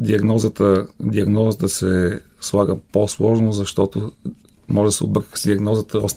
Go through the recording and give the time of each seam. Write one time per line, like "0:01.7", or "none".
none

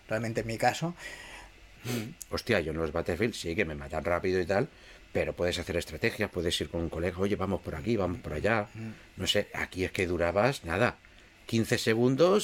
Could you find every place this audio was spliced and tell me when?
0:01.8

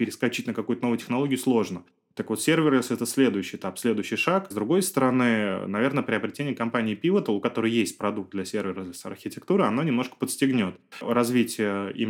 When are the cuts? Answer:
0:04.5

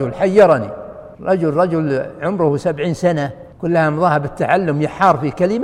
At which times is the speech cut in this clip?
0:01.1
0:03.5

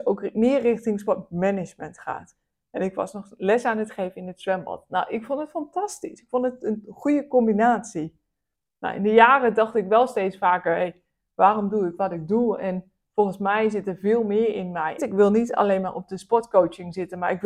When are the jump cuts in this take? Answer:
0:15.0

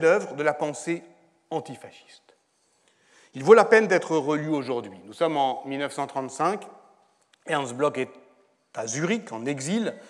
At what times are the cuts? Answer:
none

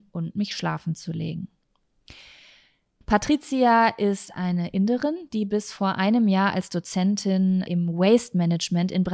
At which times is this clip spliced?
0:03.0
0:07.7

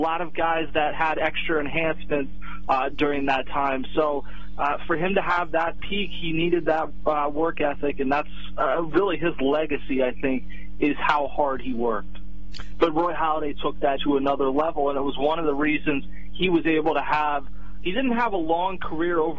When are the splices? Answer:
0:12.7
0:14.0

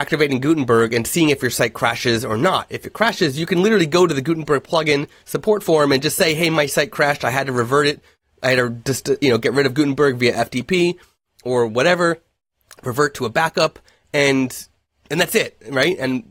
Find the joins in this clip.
none

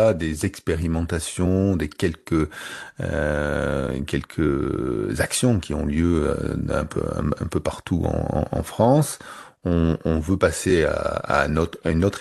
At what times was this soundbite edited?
none

